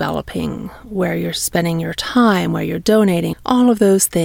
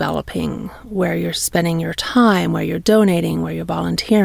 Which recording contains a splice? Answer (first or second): first